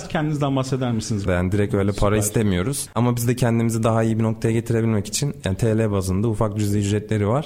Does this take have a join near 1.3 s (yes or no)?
yes